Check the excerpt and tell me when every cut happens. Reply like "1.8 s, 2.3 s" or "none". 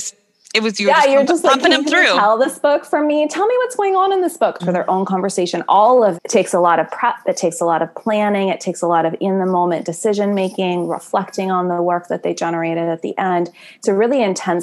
4.6 s, 6.1 s